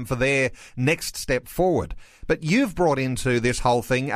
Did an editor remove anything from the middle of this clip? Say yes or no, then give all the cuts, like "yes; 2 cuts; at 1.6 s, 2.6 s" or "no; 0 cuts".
no; 0 cuts